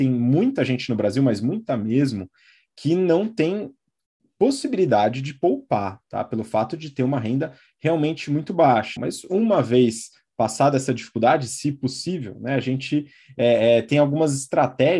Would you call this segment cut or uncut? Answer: cut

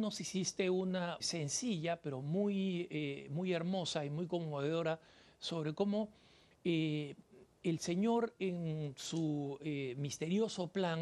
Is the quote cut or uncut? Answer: cut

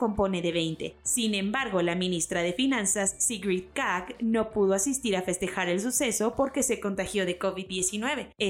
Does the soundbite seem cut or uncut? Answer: uncut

